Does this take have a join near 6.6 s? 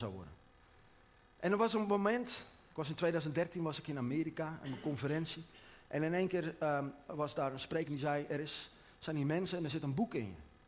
no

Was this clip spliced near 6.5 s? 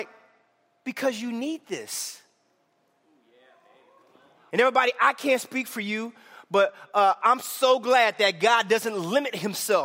no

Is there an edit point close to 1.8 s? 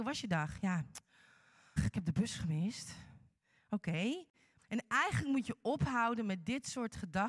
yes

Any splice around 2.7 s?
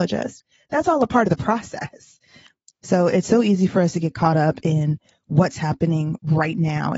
yes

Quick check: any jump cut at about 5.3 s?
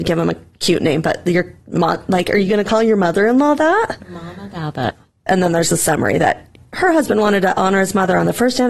yes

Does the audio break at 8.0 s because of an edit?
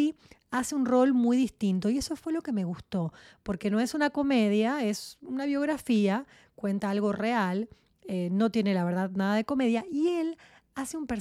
no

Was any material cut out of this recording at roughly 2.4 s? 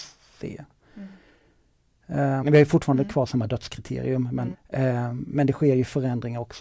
yes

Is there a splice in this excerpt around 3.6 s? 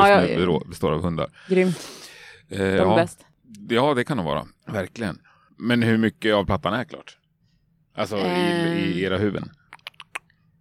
no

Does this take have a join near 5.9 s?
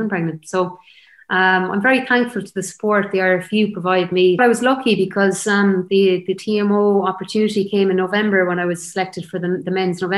yes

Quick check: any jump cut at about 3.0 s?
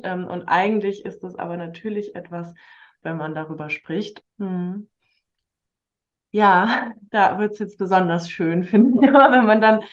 yes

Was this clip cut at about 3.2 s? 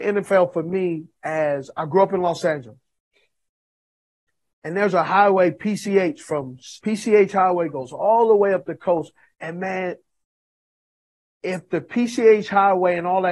no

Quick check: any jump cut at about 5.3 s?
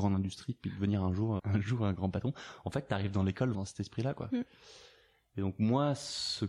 no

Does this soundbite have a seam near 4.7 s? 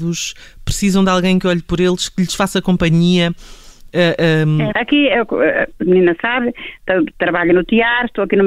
yes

